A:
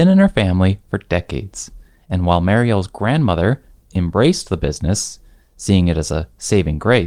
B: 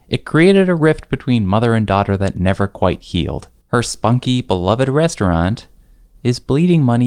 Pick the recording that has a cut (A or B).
B